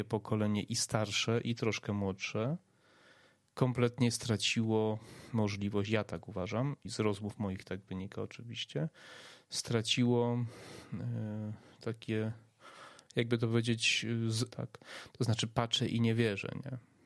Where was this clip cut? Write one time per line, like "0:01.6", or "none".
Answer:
0:06.8
0:14.5